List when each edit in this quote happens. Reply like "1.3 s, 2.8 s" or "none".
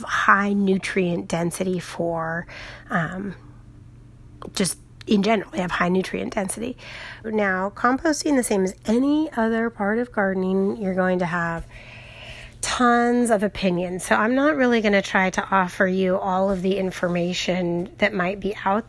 7.2 s